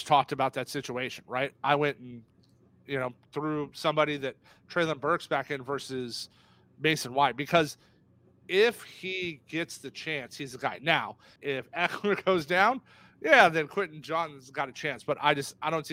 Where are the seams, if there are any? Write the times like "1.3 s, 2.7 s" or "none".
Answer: 11.4 s